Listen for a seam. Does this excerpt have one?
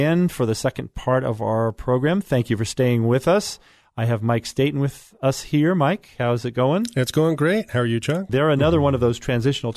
yes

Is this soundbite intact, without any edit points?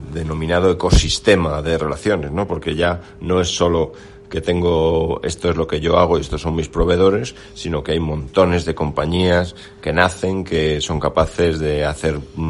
yes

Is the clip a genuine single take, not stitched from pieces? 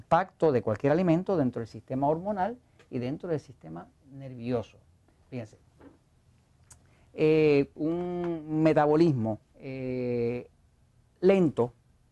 no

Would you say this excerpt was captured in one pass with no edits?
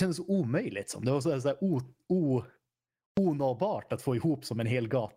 yes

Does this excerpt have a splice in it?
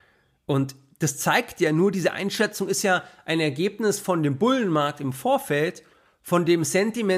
no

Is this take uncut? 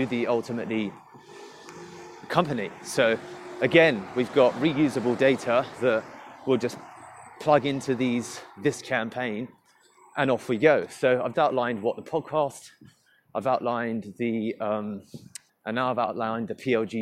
no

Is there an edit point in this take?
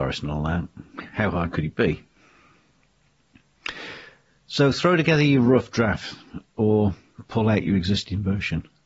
no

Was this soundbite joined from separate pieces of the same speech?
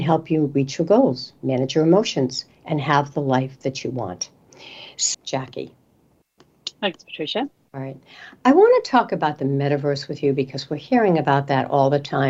yes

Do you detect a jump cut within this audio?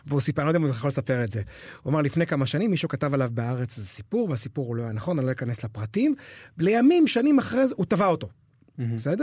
no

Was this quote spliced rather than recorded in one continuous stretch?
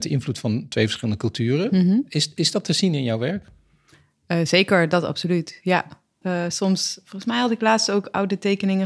yes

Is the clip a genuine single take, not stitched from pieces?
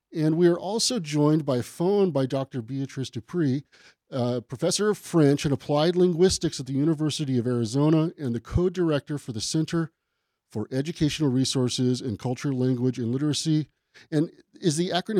yes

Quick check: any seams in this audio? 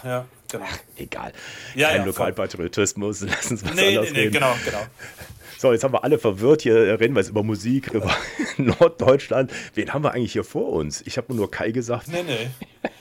yes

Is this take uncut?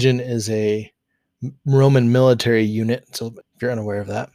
no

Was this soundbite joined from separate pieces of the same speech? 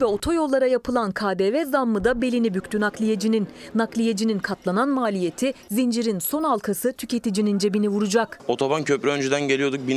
no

